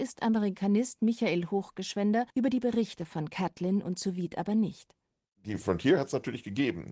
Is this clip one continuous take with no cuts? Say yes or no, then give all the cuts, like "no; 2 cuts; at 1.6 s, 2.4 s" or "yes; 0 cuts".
no; 1 cut; at 2.3 s